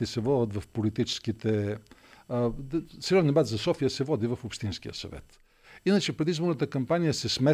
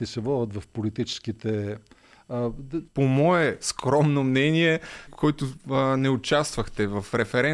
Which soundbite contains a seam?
second; 2 cuts; at 2.9 s, 5.1 s

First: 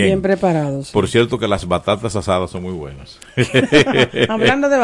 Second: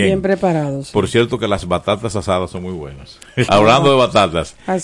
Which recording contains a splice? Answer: second; 1 cut; at 3.5 s

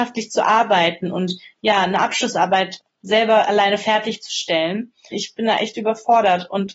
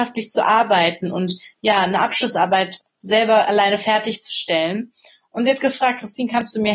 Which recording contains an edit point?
first; 1 cut; at 5.1 s

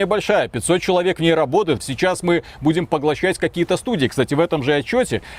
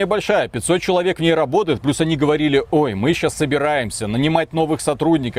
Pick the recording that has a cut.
first; 1 cut; at 1.8 s

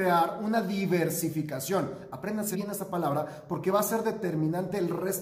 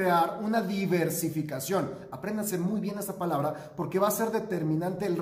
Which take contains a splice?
first; 1 cut; at 2.5 s

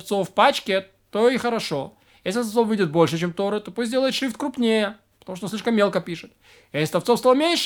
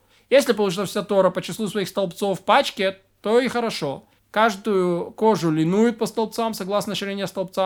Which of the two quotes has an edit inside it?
second; 1 cut; at 4.2 s

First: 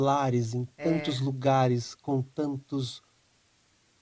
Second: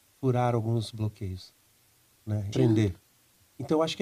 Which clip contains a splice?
second; 1 cut; at 2.5 s

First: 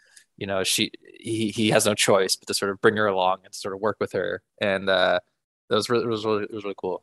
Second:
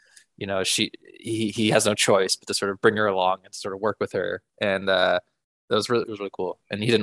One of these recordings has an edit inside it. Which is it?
second; 1 cut; at 6.0 s

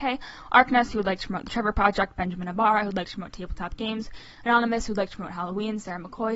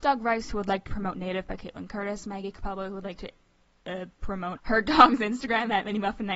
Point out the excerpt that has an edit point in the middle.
second; 1 cut; at 4.6 s

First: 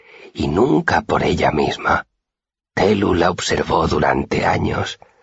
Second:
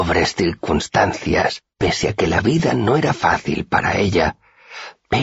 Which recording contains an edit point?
second; 1 cut; at 1.7 s

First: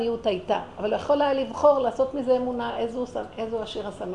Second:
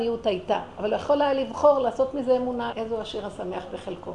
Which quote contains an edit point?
second; 1 cut; at 2.7 s

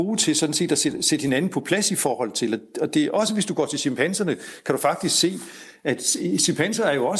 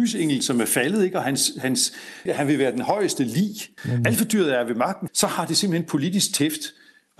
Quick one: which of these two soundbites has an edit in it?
second; 3 cuts; at 2.3 s, 3.8 s, 5.1 s

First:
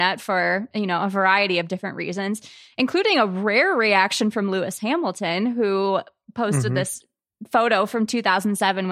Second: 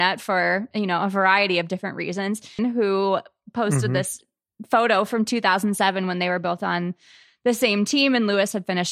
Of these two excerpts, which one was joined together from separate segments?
second; 1 cut; at 2.6 s

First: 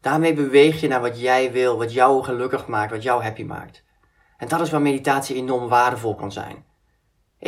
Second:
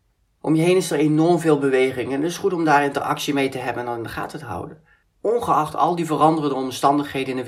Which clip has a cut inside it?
second; 1 cut; at 5.0 s

